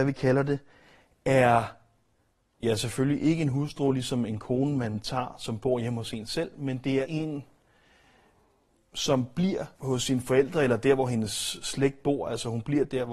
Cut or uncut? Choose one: cut